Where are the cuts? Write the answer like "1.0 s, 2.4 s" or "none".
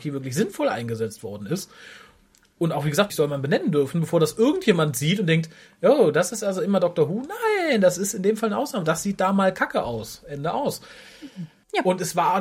3.1 s